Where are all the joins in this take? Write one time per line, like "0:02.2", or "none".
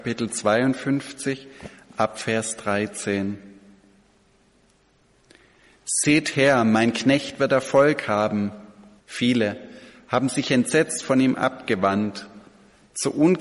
0:09.0